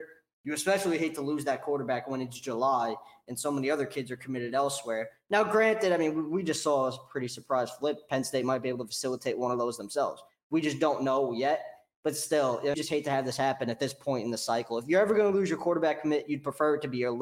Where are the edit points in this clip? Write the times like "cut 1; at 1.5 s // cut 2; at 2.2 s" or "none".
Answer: cut 1; at 12.7 s